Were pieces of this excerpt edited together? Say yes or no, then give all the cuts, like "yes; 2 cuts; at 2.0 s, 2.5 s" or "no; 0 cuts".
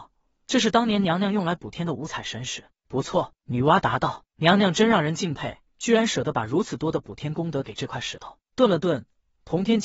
yes; 1 cut; at 5.7 s